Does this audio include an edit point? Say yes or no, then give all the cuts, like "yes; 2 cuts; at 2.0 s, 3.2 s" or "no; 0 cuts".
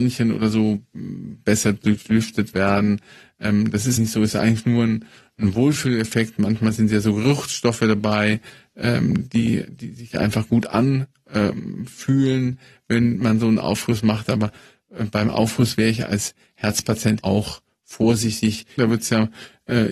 yes; 3 cuts; at 4.0 s, 17.2 s, 18.8 s